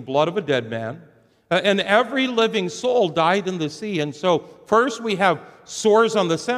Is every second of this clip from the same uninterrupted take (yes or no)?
yes